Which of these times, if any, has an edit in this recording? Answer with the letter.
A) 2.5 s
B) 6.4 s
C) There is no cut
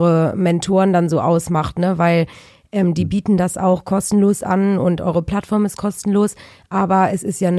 C